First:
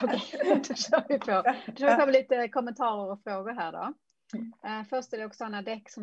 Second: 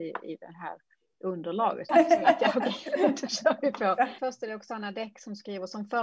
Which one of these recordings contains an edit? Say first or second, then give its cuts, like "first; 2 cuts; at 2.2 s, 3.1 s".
second; 2 cuts; at 1.9 s, 4.2 s